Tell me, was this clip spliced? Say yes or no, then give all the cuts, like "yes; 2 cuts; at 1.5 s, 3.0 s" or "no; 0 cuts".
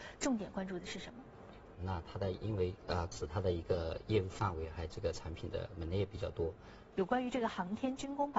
yes; 3 cuts; at 1.7 s, 3.1 s, 6.9 s